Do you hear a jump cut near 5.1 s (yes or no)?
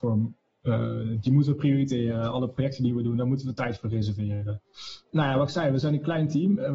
yes